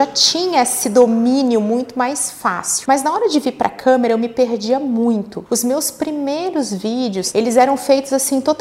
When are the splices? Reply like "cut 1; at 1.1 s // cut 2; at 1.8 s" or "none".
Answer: none